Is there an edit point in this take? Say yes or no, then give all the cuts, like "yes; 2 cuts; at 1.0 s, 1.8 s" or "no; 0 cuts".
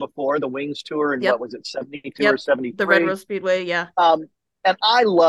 no; 0 cuts